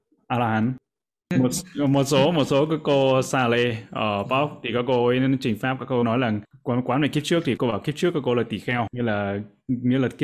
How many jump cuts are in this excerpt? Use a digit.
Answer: 1